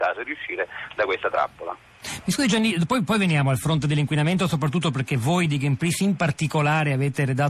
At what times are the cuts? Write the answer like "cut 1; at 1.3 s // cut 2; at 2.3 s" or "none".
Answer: none

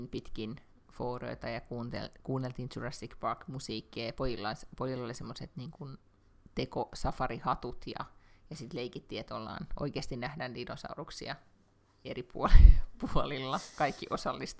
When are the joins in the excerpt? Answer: none

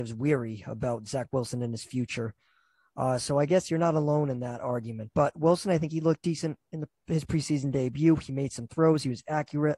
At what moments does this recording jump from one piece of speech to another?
none

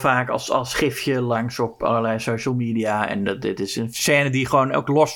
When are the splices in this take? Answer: none

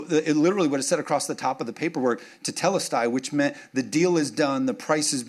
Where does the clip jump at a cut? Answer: none

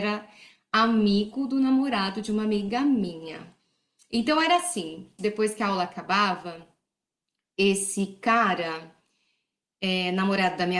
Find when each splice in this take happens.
cut 1; at 5.2 s

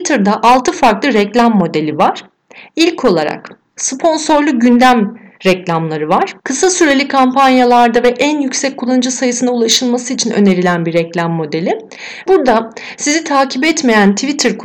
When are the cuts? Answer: cut 1; at 6.4 s // cut 2; at 12.3 s

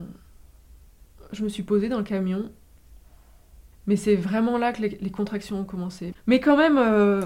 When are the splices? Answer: cut 1; at 3.7 s // cut 2; at 6.1 s

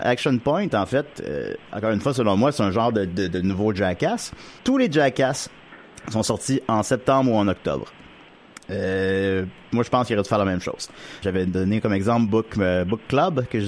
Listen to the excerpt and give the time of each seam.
cut 1; at 4.6 s // cut 2; at 11.2 s

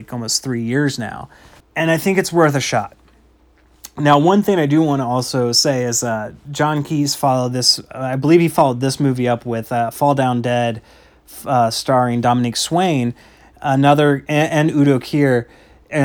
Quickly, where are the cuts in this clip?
cut 1; at 1.6 s

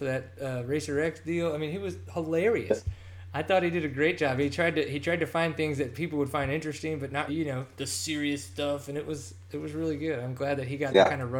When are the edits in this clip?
cut 1; at 7.3 s

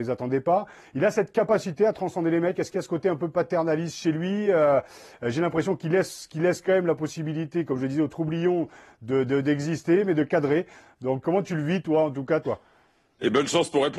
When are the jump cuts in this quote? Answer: cut 1; at 11.2 s // cut 2; at 12.4 s

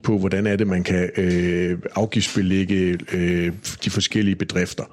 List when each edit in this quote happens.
none

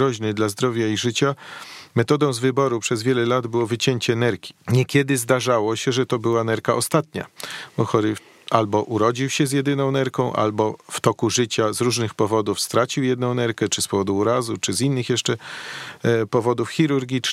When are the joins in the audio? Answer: cut 1; at 4.6 s

